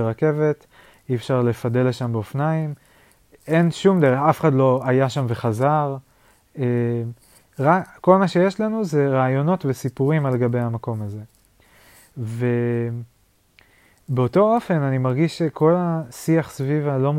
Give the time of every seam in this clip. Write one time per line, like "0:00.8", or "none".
none